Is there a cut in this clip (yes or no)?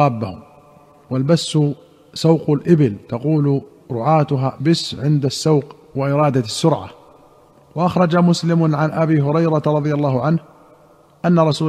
yes